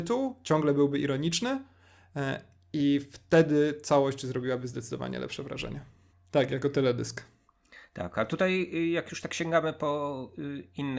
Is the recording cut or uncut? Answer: cut